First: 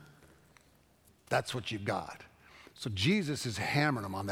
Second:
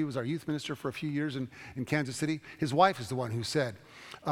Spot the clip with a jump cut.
first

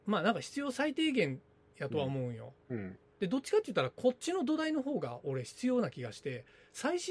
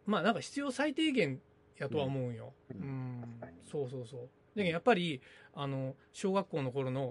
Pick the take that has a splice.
second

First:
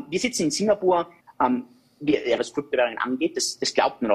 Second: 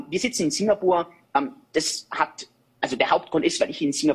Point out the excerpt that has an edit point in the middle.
first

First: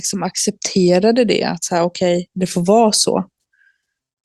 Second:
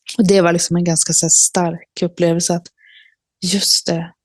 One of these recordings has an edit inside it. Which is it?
first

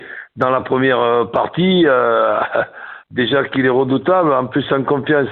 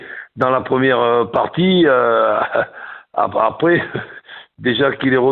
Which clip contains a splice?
first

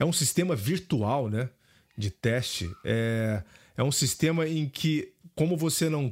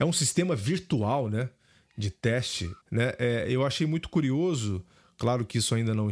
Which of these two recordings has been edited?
second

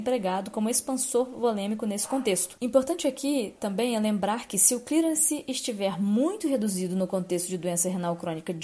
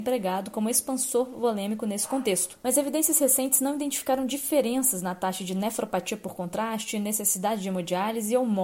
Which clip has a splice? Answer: first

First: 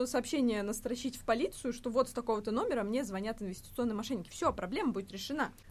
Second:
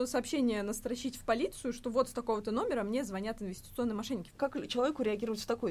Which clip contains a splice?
second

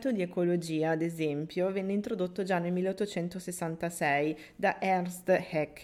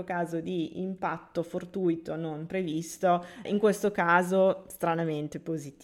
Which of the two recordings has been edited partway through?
second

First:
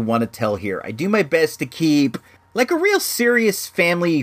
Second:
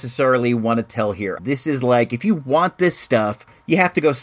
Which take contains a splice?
second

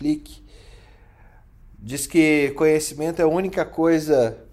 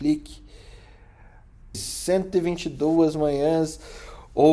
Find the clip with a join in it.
second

